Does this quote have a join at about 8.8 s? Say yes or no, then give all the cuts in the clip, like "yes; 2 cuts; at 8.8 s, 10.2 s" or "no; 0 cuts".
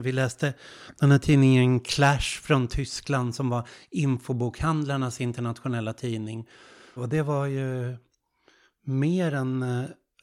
no; 1 cut; at 7.0 s